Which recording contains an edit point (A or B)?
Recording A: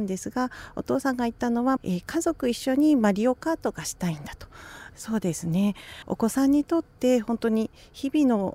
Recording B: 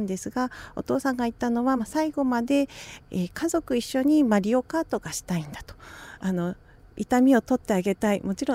A